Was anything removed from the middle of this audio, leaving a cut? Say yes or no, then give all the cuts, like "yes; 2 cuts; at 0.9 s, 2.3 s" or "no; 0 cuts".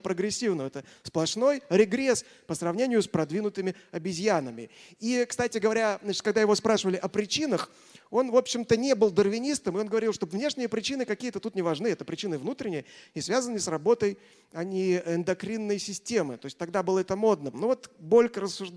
yes; 1 cut; at 17.5 s